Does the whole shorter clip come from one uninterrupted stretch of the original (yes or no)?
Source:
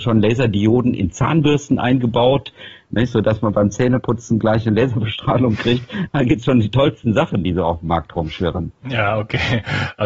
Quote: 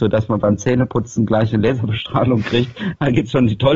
yes